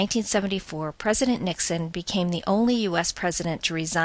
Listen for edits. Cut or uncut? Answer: uncut